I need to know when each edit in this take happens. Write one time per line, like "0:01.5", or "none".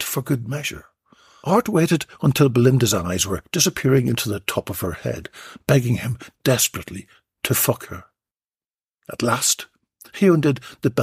0:01.4

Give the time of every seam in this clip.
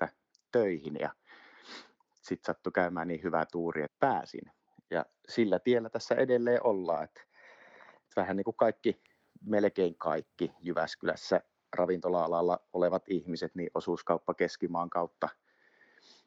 0:03.9

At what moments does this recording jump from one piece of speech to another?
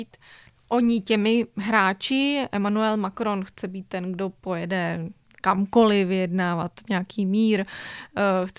none

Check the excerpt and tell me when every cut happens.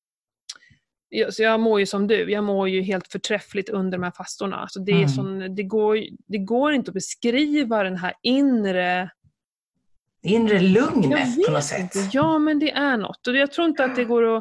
none

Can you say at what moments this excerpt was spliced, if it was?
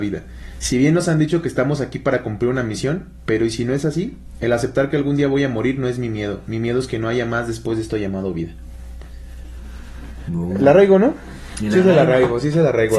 none

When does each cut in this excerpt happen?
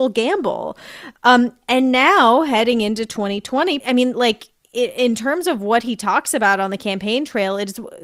0:03.8

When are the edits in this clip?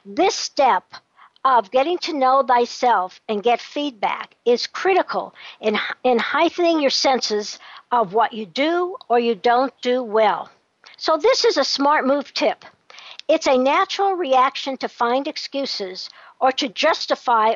0:10.9

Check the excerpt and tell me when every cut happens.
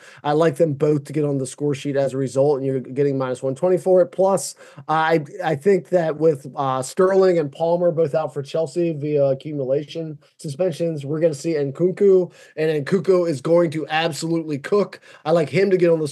none

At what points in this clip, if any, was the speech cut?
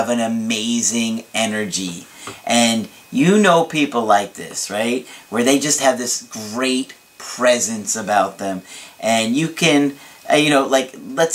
none

